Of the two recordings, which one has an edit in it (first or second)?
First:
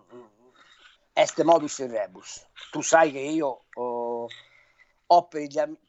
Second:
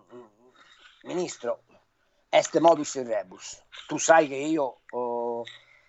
first